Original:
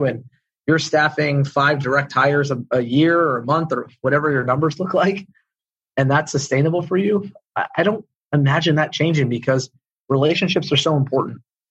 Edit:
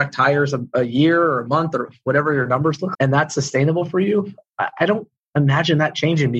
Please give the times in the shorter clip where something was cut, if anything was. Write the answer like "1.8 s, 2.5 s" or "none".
2.9 s